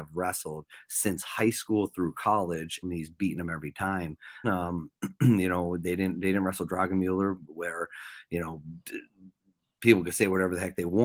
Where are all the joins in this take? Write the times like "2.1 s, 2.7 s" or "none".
2.8 s, 4.4 s